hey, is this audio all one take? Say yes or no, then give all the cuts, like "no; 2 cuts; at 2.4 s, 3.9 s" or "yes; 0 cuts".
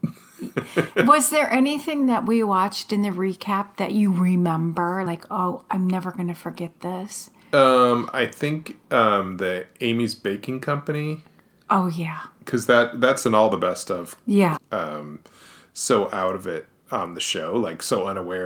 no; 2 cuts; at 5.1 s, 14.6 s